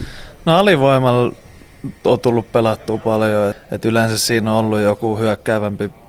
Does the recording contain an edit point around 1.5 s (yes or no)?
no